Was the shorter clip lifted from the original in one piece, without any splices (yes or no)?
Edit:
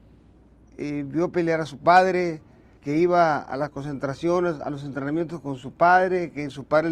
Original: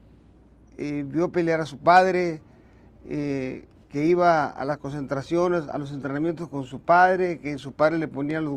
no